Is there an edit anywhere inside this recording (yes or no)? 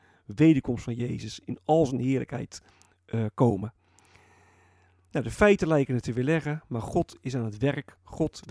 no